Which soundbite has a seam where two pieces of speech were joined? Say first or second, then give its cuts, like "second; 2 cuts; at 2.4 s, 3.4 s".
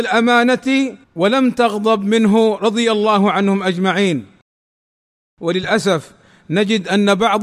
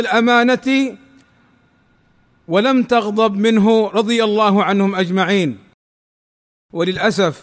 first; 1 cut; at 1.0 s